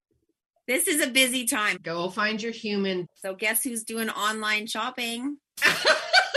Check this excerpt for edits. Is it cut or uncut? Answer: cut